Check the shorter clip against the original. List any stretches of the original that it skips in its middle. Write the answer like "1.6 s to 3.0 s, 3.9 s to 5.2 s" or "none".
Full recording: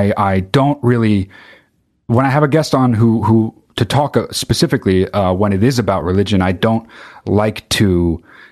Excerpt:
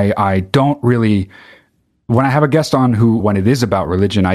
3.2 s to 5.4 s